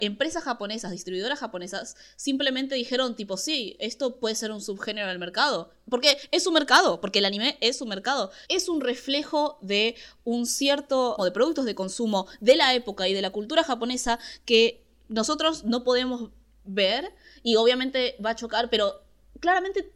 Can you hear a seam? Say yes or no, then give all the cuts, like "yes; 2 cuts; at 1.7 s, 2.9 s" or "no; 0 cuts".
yes; 2 cuts; at 8.4 s, 11.2 s